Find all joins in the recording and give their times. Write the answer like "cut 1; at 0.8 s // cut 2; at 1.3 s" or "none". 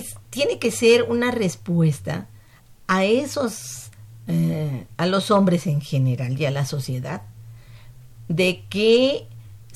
none